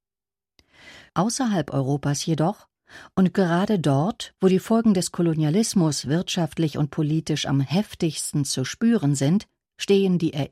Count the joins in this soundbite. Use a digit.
2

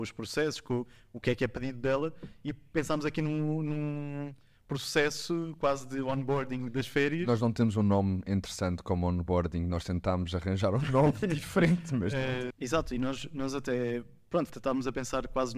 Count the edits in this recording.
2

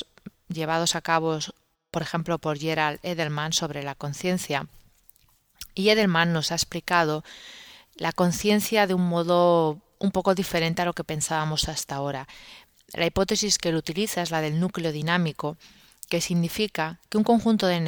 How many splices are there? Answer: 0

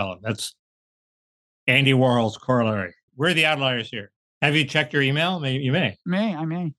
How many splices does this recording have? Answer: 1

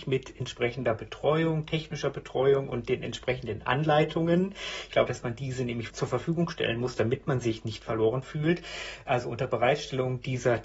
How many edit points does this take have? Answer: 1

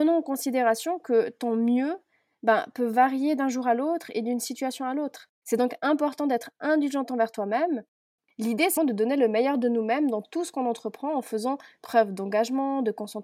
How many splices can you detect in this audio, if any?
2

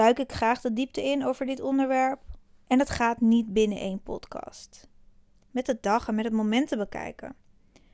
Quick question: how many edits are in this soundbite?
1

